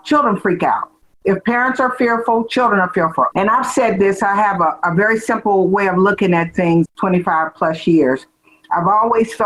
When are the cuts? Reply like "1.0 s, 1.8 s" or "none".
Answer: 3.3 s, 6.9 s